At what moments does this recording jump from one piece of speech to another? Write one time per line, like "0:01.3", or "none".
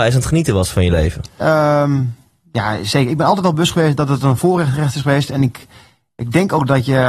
0:01.4